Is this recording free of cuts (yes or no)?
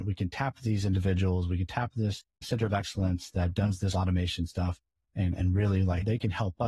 no